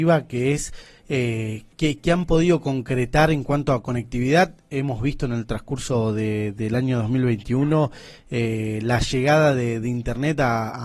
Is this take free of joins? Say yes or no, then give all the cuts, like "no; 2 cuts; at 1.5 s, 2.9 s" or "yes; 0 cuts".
yes; 0 cuts